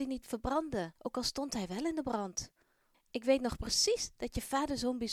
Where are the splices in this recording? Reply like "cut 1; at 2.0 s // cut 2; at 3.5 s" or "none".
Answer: cut 1; at 1.0 s // cut 2; at 2.9 s